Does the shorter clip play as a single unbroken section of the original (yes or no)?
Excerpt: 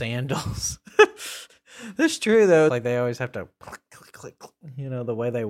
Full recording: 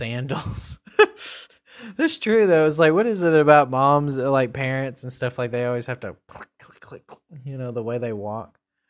no